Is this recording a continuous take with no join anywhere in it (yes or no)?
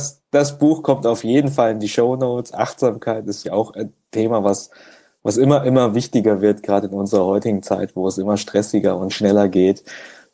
no